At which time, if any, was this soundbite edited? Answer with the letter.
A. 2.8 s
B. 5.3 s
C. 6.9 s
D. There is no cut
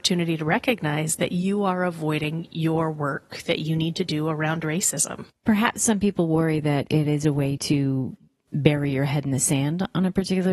B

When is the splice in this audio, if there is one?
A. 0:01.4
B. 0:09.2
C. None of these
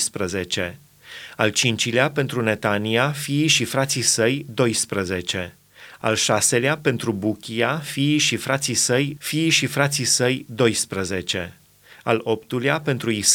B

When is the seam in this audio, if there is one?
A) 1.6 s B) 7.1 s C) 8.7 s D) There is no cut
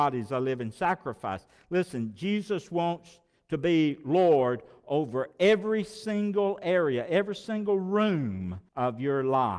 C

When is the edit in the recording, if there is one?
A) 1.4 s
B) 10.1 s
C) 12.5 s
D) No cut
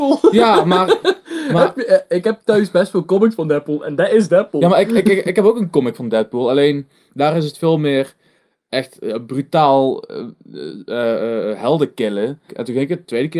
C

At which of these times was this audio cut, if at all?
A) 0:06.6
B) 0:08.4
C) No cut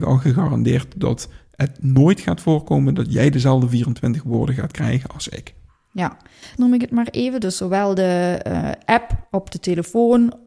A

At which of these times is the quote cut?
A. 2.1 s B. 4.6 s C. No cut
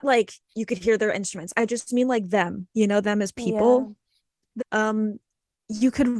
B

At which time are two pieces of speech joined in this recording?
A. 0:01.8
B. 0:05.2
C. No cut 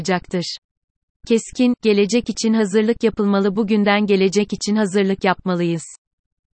A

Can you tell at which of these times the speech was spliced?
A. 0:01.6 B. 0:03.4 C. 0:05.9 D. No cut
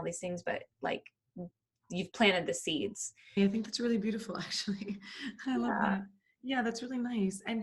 B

